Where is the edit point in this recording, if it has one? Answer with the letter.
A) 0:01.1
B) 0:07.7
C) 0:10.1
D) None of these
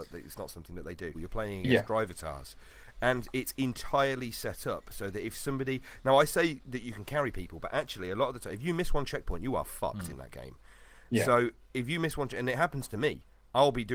A